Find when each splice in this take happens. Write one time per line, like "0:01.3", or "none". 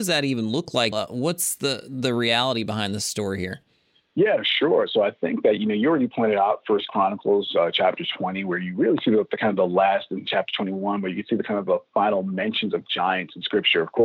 0:00.9